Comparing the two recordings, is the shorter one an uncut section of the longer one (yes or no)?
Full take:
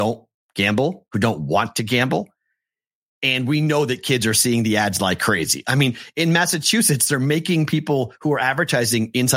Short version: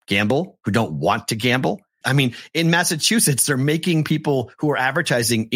no